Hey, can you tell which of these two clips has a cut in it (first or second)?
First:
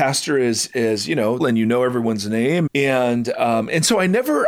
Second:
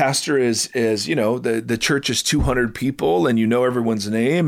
first